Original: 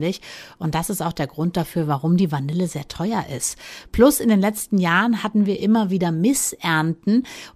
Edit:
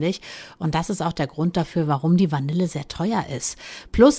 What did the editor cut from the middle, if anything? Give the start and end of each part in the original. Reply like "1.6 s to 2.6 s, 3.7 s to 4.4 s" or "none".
none